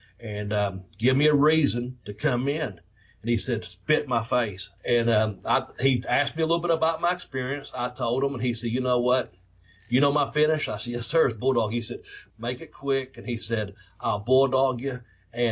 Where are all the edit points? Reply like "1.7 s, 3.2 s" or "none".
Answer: 4.8 s, 12.3 s